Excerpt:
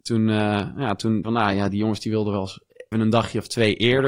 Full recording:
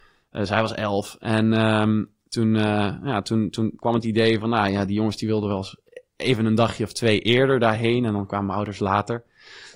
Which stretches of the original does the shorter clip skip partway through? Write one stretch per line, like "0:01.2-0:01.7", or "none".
0:03.5-0:04.4
0:06.1-0:06.4